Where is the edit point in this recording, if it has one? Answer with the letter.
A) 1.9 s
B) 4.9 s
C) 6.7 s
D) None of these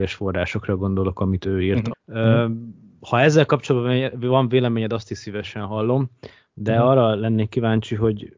A